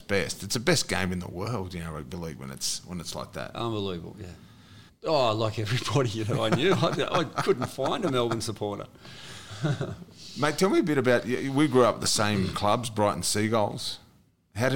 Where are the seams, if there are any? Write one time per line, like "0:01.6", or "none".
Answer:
0:04.9